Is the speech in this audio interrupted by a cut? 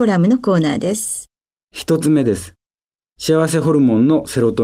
yes; 1 cut; at 1.6 s

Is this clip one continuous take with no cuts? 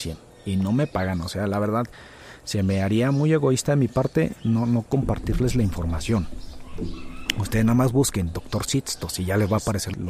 yes; 0 cuts

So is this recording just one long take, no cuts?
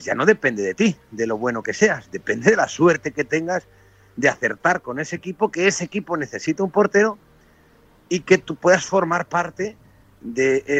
yes; 0 cuts

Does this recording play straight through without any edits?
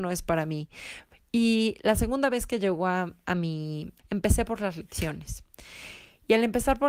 no; 1 cut; at 4.0 s

